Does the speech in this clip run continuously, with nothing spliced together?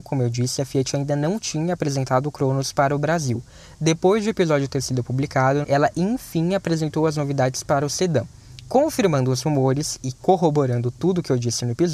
no; 1 cut; at 5.6 s

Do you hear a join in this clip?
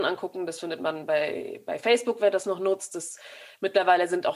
no; 0 cuts

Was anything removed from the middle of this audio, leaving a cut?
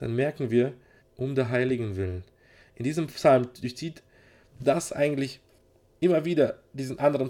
yes; 1 cut; at 1.0 s

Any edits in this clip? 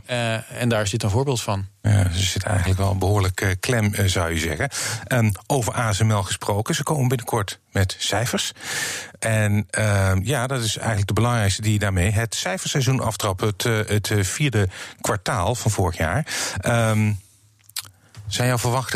yes; 1 cut; at 9.2 s

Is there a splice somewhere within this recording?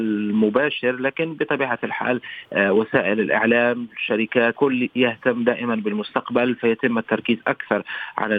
yes; 1 cut; at 4.5 s

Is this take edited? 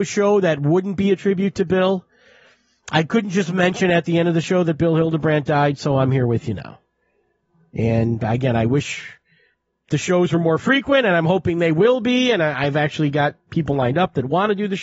no; 0 cuts

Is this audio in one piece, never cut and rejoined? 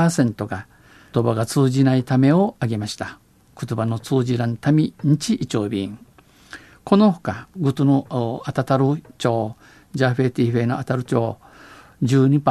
no; 2 cuts; at 1.1 s, 7.6 s

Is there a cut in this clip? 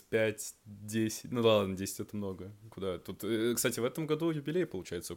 no; 0 cuts

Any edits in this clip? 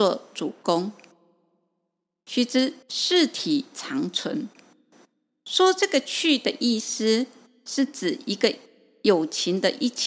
yes; 1 cut; at 2.8 s

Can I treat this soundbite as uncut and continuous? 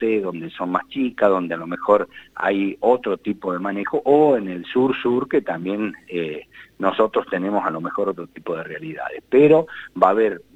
yes; 0 cuts

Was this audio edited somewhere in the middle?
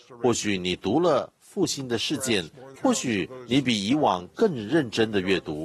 yes; 1 cut; at 2.8 s

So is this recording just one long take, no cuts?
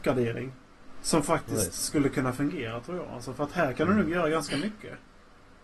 yes; 0 cuts

